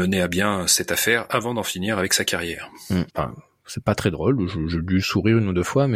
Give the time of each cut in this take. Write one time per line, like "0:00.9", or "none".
0:03.1